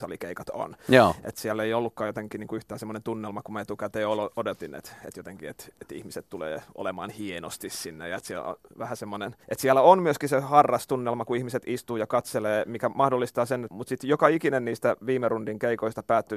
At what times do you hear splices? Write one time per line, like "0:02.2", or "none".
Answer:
0:09.4
0:13.7